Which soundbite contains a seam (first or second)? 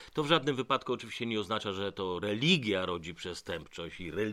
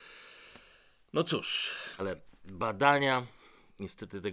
second